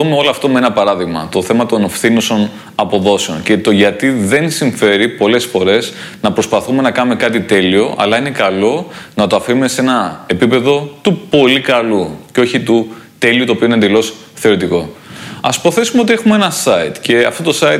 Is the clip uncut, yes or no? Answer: yes